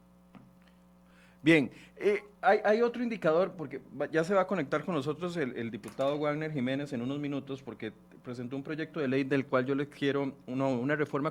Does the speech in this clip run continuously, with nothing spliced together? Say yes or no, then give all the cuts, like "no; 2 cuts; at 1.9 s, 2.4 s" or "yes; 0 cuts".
yes; 0 cuts